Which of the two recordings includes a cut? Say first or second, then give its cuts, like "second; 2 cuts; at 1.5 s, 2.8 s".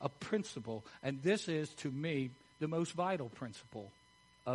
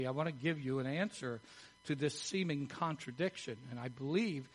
first; 1 cut; at 2.5 s